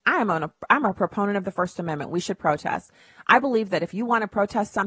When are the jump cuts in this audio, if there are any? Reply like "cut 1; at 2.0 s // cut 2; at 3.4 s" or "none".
none